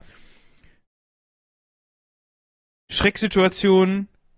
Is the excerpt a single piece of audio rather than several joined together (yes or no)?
yes